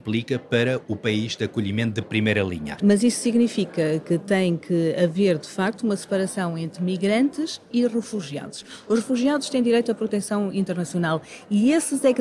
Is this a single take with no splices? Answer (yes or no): no